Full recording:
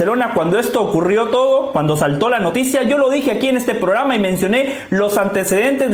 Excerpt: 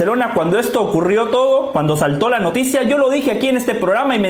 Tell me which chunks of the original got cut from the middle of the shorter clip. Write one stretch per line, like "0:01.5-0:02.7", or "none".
none